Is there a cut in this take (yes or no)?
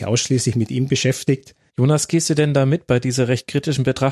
yes